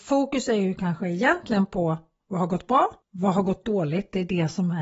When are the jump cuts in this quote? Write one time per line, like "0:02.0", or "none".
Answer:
0:03.0